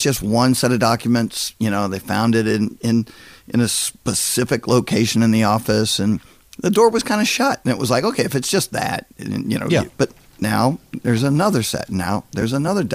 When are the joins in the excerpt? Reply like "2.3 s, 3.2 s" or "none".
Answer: 9.9 s

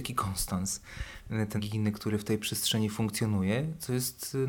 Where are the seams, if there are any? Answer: 1.6 s

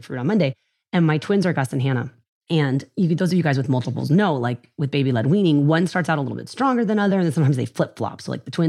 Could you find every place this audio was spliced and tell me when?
none

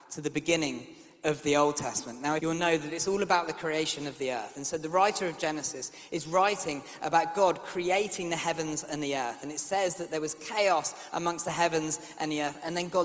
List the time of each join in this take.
2.4 s

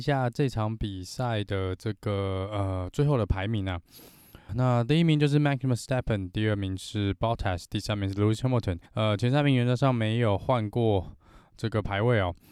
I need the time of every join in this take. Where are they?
4.5 s, 8.9 s

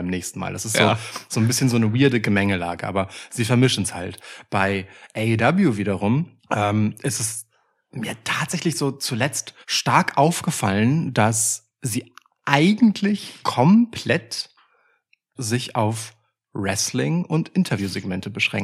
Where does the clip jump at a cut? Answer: 6.4 s, 9.6 s, 15.4 s

